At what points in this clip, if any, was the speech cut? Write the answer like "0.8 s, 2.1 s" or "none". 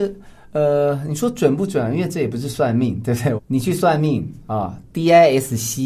3.4 s